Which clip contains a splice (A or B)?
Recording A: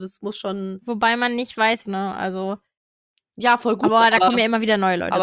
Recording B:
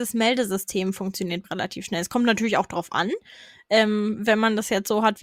A